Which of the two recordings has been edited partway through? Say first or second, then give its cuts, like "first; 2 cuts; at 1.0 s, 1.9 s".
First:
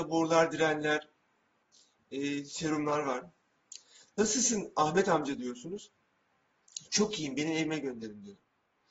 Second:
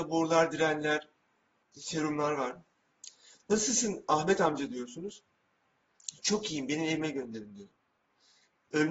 second; 1 cut; at 1.8 s